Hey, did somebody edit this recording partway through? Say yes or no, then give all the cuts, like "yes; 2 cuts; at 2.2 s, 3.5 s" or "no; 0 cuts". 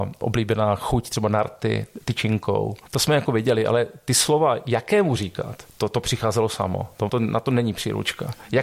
yes; 2 cuts; at 5.7 s, 7.1 s